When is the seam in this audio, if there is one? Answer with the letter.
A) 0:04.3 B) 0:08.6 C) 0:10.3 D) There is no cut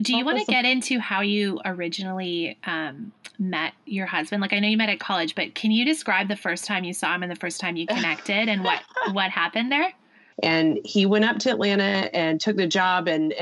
C